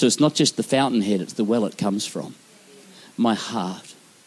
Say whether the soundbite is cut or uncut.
uncut